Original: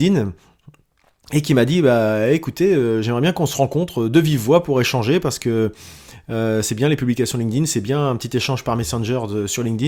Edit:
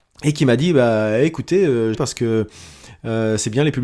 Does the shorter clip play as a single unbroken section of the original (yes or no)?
no